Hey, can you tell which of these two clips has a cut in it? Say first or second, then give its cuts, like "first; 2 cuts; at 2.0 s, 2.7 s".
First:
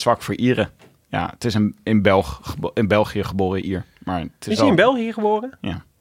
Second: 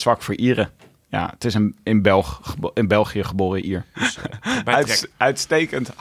second; 1 cut; at 3.9 s